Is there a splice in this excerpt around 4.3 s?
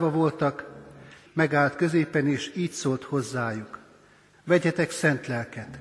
yes; 2 cuts; at 1.3 s, 4.3 s

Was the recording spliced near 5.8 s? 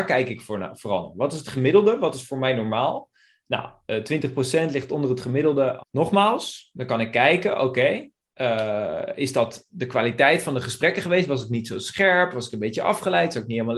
yes; 1 cut; at 5.8 s

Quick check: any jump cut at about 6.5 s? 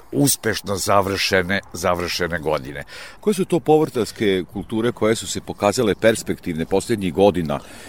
no; 2 cuts; at 3.2 s, 4.9 s

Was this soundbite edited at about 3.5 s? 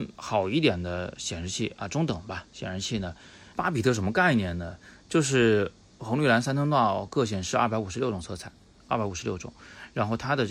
yes; 1 cut; at 3.5 s

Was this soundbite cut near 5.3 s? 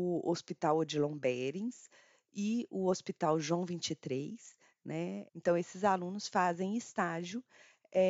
yes; 1 cut; at 5.3 s

